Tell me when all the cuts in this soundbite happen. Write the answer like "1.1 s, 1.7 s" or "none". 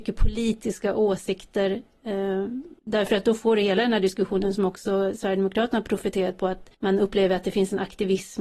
2.8 s, 6.7 s